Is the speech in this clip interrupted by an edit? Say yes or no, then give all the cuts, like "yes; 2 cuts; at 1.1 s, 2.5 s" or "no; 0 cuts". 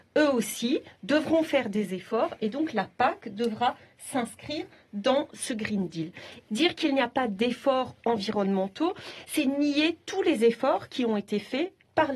yes; 1 cut; at 6.5 s